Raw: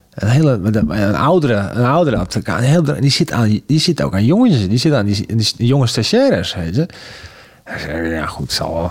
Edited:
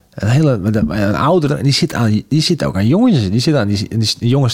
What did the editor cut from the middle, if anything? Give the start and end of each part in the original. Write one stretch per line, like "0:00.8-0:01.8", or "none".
0:01.5-0:02.8